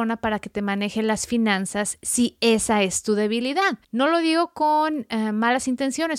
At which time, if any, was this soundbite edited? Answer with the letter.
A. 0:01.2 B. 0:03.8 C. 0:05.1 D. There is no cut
B